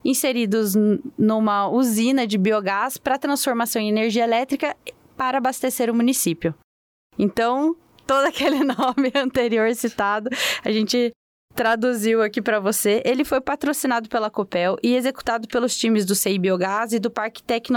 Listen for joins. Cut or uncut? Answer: uncut